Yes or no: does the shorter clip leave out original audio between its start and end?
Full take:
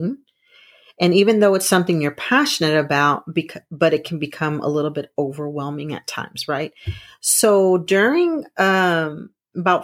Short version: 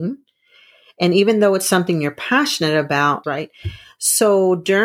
yes